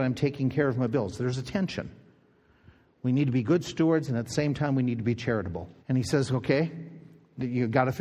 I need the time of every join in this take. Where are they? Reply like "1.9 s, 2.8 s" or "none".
5.8 s